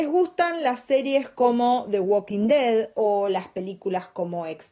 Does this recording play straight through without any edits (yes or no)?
yes